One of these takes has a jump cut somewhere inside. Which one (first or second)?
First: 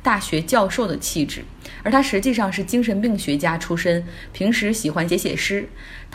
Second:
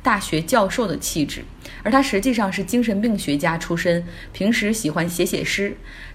first